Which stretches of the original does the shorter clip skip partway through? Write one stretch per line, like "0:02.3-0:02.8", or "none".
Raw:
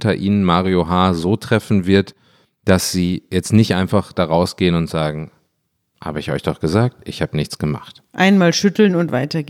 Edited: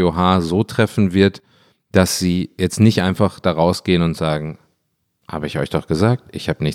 none